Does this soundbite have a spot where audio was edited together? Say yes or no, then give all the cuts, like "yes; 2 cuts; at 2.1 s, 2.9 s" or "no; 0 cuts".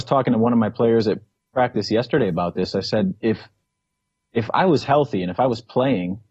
no; 0 cuts